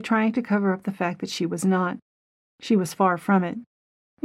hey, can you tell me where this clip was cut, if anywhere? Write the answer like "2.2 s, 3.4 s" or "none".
none